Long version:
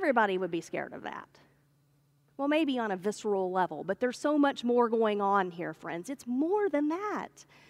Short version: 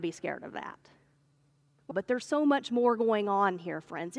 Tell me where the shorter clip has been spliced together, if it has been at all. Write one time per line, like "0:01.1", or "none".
0:01.9